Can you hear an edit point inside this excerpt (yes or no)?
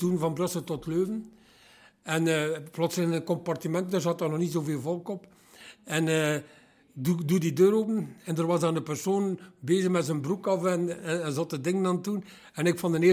no